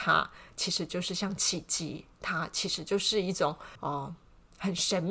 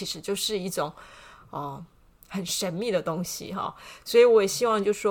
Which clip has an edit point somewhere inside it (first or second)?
first